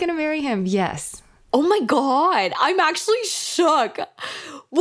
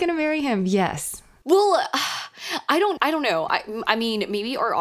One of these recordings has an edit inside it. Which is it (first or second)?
second